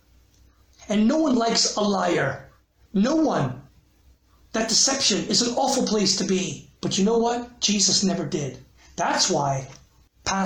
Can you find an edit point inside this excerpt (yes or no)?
yes